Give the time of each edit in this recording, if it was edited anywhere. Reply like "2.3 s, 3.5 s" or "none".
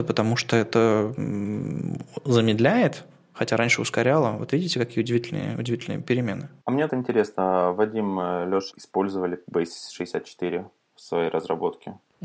6.9 s, 8.7 s

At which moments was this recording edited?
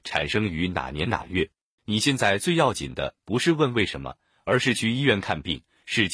1.8 s

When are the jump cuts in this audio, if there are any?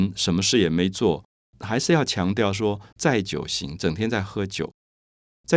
1.4 s, 2.9 s

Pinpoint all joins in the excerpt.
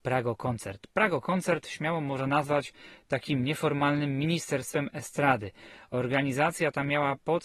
none

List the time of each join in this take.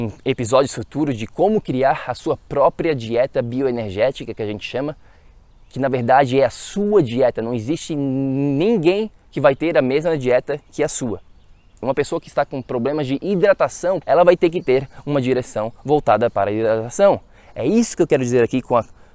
11.8 s, 14.0 s

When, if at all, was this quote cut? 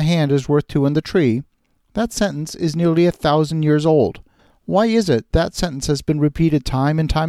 5.3 s

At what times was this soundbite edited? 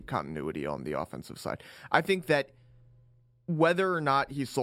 none

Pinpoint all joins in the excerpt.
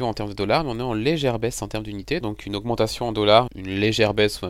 2.2 s, 3.5 s

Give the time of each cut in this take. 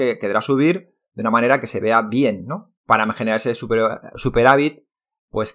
2.8 s

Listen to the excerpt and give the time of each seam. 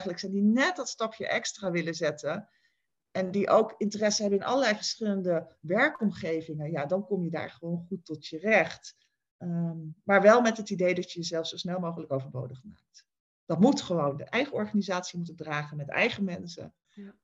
none

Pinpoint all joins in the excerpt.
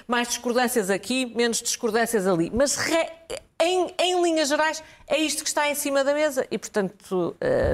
none

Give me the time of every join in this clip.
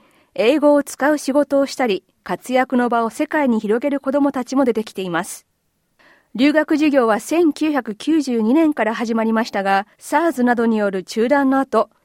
9.9 s

